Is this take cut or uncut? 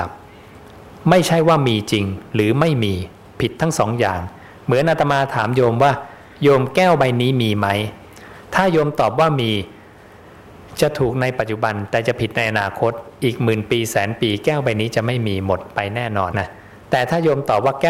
cut